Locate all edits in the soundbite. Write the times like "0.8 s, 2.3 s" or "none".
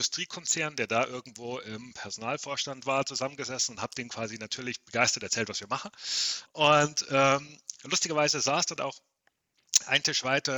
6.5 s, 8.8 s